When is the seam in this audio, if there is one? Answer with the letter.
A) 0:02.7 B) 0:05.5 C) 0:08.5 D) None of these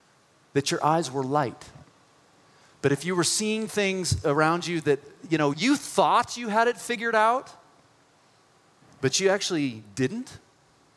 B